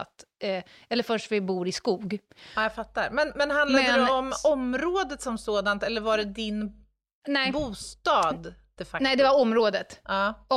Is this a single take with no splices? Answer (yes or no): yes